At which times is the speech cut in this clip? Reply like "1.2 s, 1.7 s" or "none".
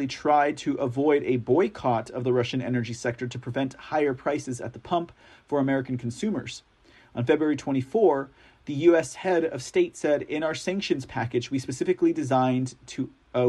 none